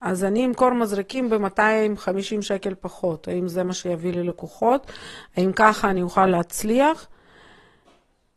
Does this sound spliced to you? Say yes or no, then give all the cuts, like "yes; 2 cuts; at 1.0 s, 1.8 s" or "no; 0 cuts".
no; 0 cuts